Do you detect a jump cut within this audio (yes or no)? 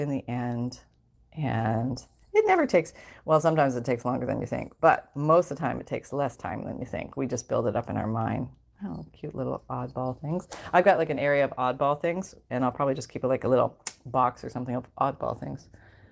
no